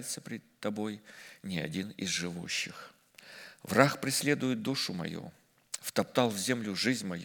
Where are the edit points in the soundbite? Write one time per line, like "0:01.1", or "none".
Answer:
none